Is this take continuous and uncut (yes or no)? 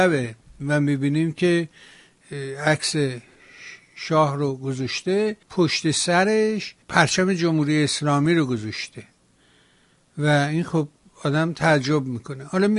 no